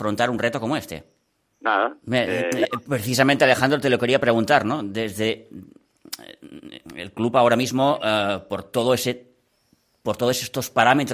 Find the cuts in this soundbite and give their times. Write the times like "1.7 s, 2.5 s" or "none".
1.5 s

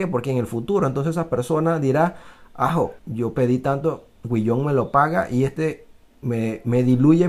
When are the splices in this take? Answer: 3.0 s

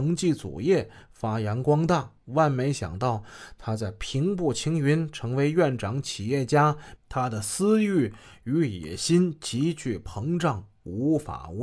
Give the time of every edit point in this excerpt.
7.0 s

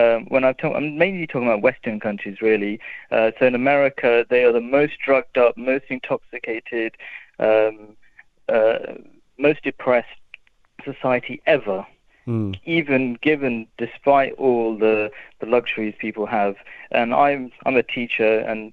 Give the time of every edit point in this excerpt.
none

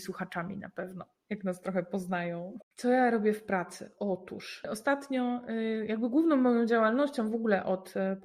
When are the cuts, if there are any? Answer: 2.6 s

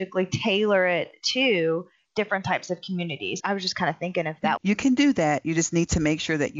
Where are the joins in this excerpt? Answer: 3.4 s, 4.6 s

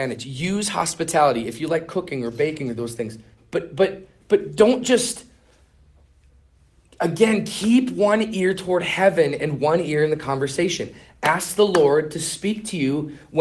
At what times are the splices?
none

